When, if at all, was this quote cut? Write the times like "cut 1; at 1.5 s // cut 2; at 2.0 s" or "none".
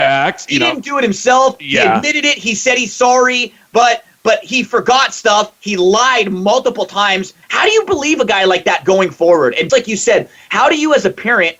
cut 1; at 7.4 s // cut 2; at 9.7 s